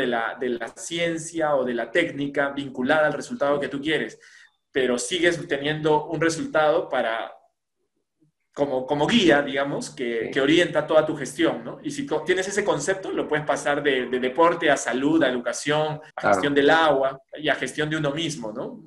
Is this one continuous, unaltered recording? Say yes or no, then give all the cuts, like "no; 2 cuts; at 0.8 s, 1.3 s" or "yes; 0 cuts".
no; 2 cuts; at 16.1 s, 17.3 s